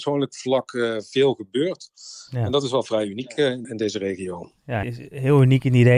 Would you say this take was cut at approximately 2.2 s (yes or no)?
no